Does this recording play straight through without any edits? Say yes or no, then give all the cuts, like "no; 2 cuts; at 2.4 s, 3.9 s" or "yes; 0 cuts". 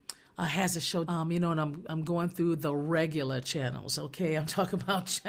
no; 1 cut; at 1.0 s